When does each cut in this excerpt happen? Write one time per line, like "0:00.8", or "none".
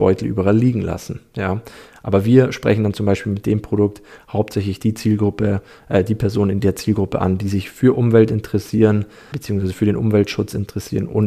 0:09.3